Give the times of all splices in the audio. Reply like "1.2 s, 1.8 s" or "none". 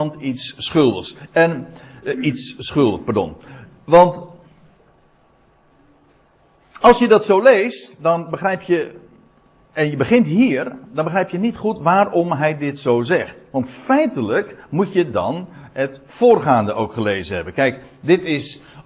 none